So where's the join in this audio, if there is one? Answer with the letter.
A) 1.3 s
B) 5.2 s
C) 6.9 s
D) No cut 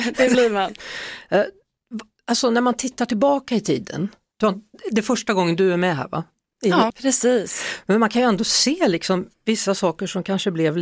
C